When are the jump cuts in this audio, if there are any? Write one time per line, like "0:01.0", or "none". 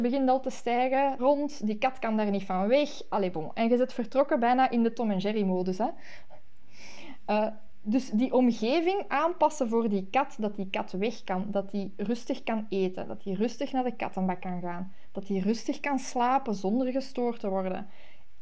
0:01.2